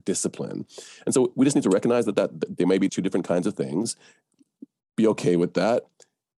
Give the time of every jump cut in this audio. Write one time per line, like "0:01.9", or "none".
0:02.9